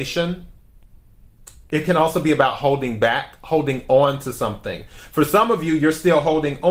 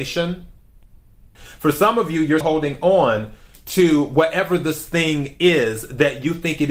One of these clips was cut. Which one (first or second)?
second